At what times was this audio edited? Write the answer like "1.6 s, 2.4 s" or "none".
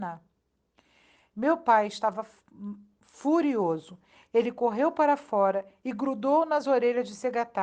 none